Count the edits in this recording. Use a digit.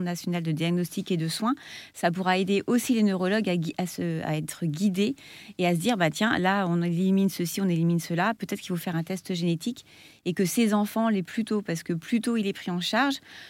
0